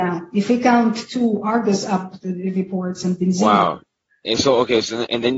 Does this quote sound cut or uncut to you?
uncut